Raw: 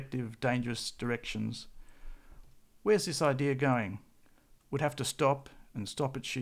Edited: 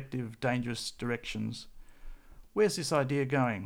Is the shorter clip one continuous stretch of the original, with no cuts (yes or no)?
no